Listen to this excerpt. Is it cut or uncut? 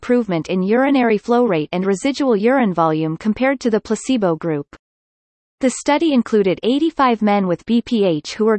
cut